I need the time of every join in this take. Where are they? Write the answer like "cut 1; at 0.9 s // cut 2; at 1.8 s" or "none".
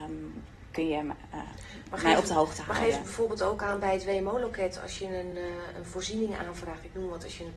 none